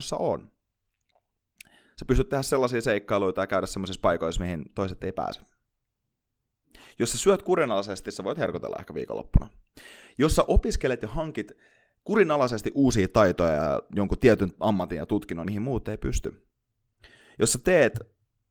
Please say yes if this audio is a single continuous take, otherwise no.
no